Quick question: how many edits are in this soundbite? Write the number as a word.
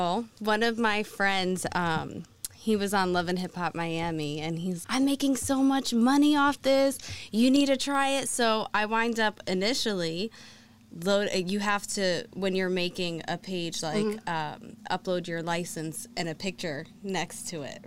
one